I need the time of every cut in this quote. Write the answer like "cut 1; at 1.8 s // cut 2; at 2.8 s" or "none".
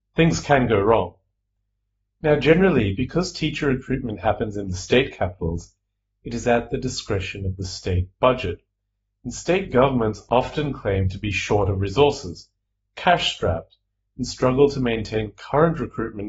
none